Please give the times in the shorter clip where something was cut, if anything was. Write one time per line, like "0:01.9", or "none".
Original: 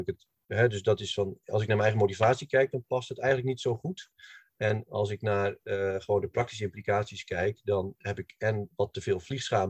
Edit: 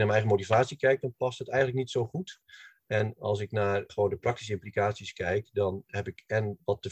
0:03.9